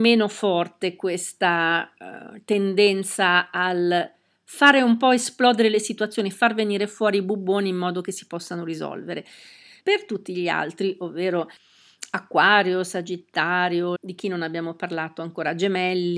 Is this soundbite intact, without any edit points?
no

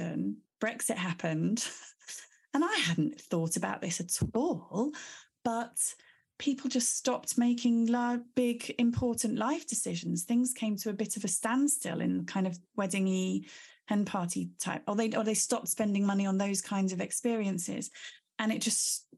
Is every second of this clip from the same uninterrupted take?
yes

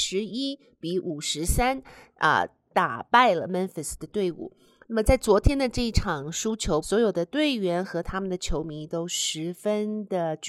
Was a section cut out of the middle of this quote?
yes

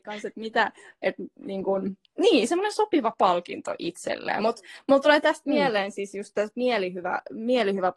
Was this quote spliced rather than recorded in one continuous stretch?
no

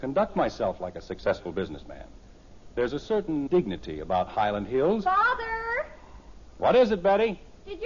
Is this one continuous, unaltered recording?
no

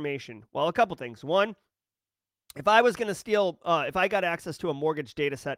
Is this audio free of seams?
yes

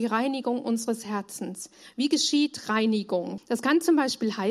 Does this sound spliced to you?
yes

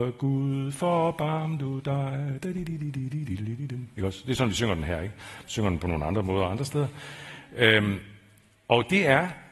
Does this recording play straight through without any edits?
yes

